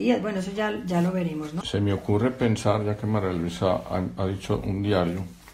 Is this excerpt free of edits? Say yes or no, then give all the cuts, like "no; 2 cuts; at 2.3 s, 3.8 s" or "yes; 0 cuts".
no; 2 cuts; at 1.6 s, 4.2 s